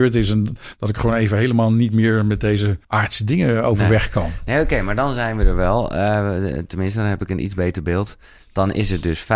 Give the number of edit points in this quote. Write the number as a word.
one